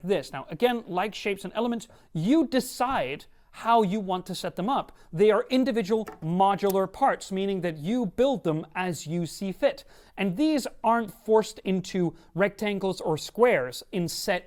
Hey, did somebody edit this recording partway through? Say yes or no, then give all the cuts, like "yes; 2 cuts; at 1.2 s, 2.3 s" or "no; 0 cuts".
no; 0 cuts